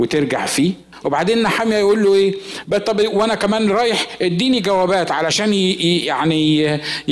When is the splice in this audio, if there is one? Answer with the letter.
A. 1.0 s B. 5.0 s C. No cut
A